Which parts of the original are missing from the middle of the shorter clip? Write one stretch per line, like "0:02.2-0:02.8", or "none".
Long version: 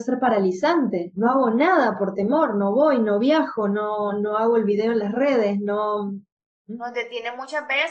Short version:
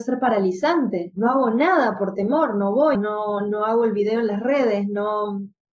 0:02.9-0:03.7